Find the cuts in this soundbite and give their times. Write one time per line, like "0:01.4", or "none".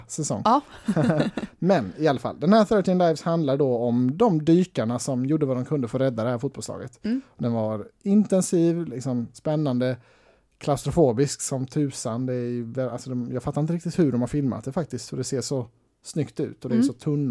none